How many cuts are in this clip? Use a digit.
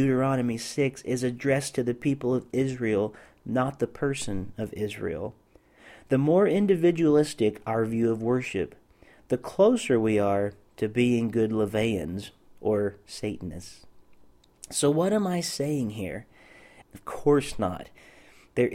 1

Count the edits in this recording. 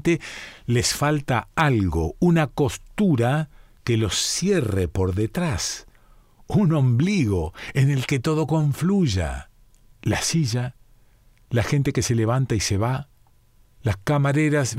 1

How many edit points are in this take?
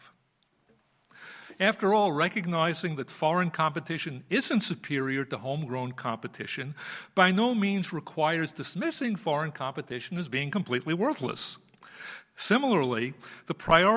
0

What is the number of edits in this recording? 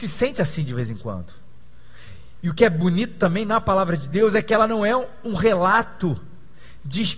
0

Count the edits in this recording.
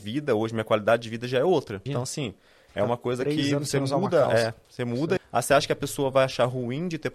2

